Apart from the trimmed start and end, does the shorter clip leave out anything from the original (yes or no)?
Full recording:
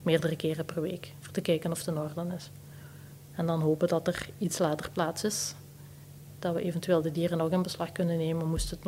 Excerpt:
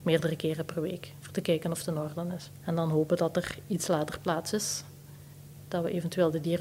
yes